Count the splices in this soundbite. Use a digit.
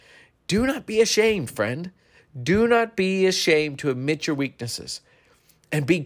0